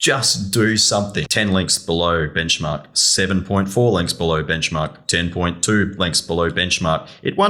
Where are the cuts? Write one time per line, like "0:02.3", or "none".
0:01.3